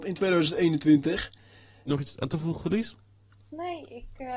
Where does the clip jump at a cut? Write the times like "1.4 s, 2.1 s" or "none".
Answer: 1.9 s